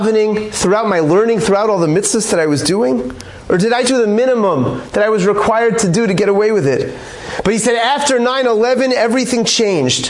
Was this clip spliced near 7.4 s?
no; 1 cut; at 3.8 s

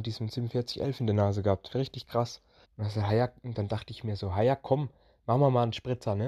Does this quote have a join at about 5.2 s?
no; 1 cut; at 2.6 s

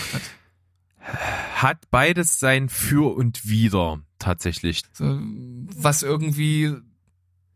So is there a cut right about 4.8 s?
yes; 1 cut; at 4.8 s

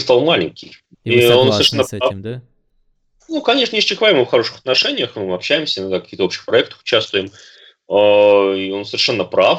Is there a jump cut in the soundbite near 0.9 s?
yes; 1 cut; at 0.9 s

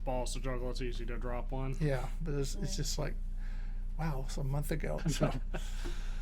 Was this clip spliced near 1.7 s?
no; 1 cut; at 5.0 s

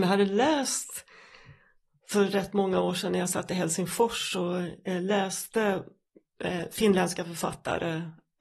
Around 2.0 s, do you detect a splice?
no; 0 cuts

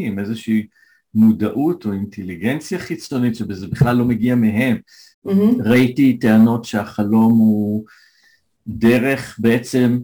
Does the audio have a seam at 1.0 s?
no; 1 cut; at 5.1 s

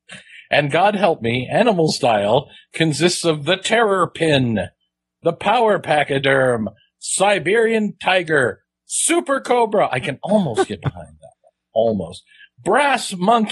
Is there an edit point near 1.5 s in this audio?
no; 0 cuts

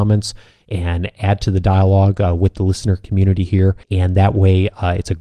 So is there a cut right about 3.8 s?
yes; 1 cut; at 3.8 s

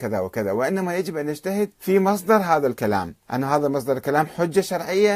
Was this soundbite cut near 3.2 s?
yes; 2 cuts; at 1.7 s, 3.2 s

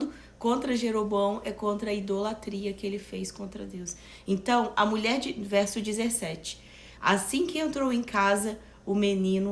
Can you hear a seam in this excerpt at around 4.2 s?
no; 1 cut; at 7.0 s

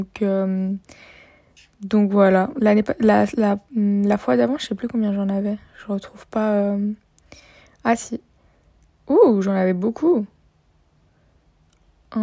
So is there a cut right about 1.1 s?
no; 0 cuts

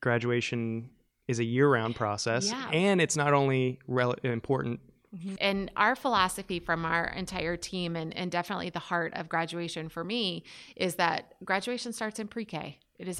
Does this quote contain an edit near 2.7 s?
no; 1 cut; at 5.4 s

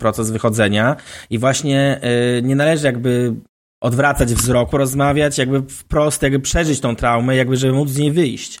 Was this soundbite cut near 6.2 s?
no; 1 cut; at 4.7 s

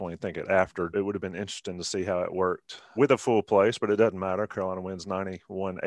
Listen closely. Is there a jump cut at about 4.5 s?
no; 2 cuts; at 0.9 s, 3.0 s

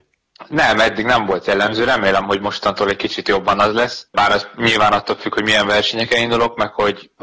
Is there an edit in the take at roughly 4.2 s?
no; 0 cuts

